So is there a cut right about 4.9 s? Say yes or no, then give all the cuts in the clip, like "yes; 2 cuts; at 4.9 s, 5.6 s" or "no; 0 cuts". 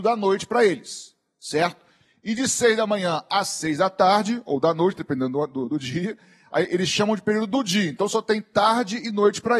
no; 0 cuts